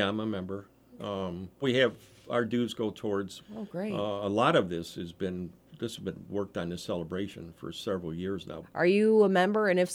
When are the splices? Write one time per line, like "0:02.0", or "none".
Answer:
0:01.6
0:03.4
0:08.6